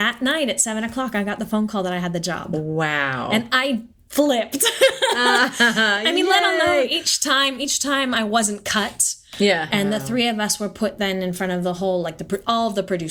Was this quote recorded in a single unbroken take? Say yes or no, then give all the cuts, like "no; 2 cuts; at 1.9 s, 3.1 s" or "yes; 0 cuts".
no; 2 cuts; at 4.1 s, 9.7 s